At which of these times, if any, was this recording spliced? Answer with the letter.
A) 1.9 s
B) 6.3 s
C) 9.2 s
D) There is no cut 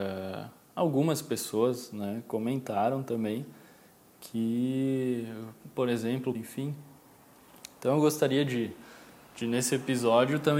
B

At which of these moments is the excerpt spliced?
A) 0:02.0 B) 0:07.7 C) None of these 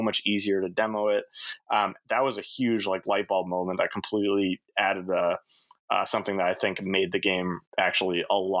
B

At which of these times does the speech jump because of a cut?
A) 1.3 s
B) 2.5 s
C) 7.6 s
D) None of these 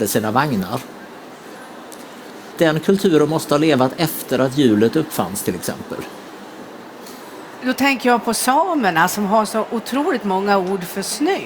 B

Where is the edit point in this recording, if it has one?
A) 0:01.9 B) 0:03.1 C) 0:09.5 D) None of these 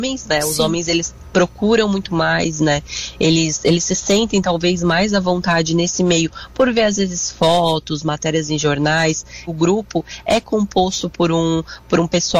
C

